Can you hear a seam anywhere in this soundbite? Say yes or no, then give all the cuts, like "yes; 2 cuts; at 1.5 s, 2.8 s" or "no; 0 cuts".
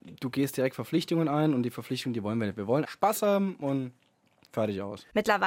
yes; 1 cut; at 2.8 s